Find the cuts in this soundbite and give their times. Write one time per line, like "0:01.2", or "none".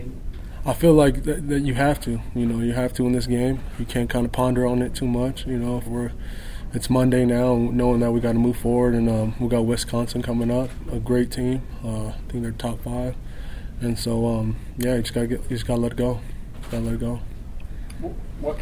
0:05.9

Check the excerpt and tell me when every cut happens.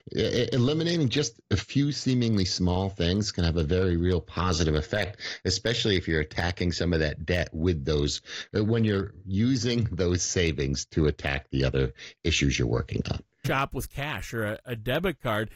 0:13.4

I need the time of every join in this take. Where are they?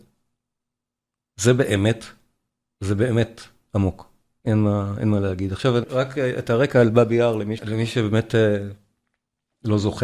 0:05.8
0:07.6

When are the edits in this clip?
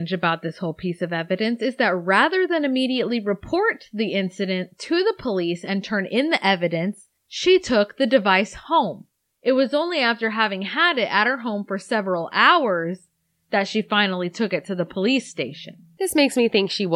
0:07.2

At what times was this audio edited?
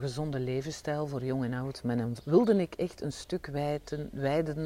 0:02.2

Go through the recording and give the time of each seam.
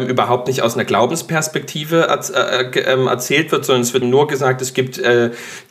0:04.0

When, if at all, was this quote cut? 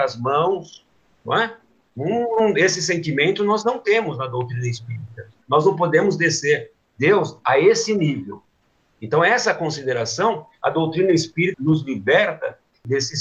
0:05.4
0:11.5

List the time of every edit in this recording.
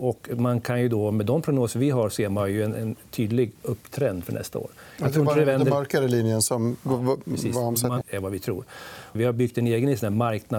0:08.0
0:09.2

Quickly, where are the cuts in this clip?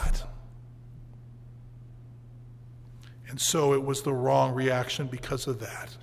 none

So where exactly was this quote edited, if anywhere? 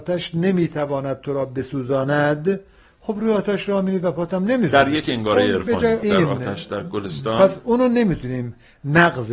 0:06.0

